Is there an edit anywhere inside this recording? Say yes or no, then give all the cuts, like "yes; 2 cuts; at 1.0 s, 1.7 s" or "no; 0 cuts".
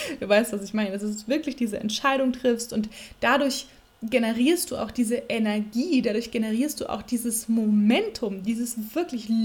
no; 0 cuts